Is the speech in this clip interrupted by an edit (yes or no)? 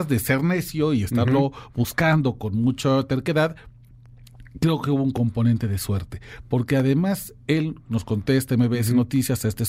no